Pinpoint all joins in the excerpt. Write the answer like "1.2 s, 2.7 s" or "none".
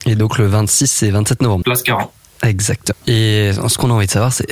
1.6 s, 2.9 s